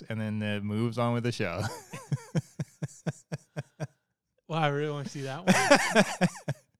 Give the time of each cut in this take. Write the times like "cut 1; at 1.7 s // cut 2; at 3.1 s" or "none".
none